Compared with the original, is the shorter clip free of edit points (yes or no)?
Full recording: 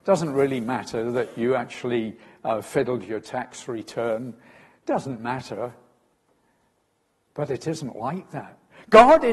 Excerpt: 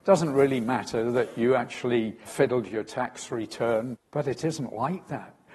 no